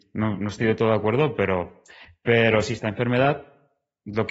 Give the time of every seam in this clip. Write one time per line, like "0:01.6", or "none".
none